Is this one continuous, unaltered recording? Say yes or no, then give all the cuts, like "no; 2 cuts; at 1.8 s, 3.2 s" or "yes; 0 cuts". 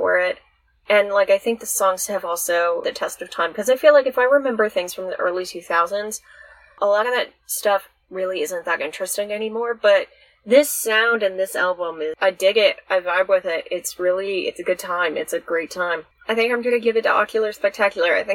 yes; 0 cuts